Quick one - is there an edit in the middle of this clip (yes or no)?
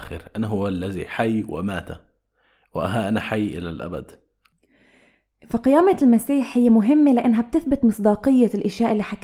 no